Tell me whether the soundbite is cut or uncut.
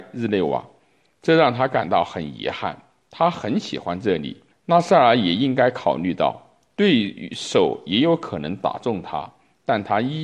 cut